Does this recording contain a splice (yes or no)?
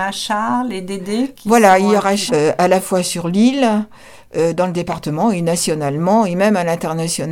yes